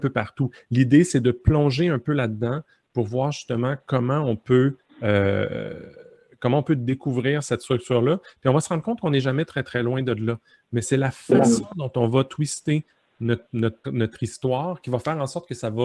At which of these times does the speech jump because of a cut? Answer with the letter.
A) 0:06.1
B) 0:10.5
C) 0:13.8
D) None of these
C